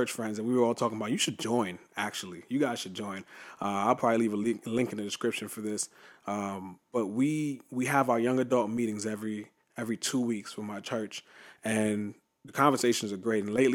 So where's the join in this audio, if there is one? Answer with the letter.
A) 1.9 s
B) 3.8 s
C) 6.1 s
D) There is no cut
D